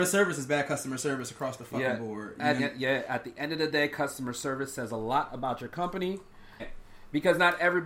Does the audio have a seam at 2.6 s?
yes; 2 cuts; at 2.6 s, 6.6 s

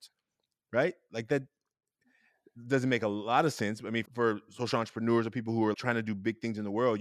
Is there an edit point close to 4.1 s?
yes; 2 cuts; at 4.1 s, 5.7 s

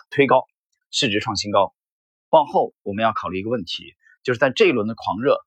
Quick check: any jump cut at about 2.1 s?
no; 0 cuts

